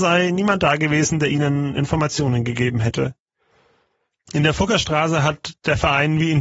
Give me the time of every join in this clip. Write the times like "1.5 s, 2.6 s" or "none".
4.1 s